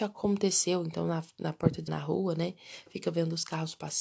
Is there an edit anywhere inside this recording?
yes; 1 cut; at 1.9 s

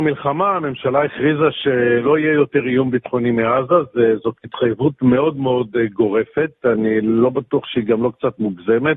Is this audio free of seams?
yes; 0 cuts

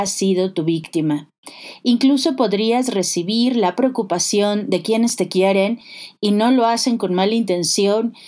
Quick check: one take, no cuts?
yes; 0 cuts

